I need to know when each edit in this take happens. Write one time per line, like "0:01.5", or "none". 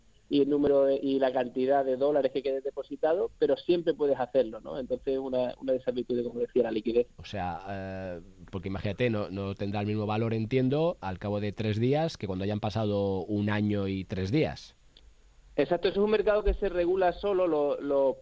0:07.2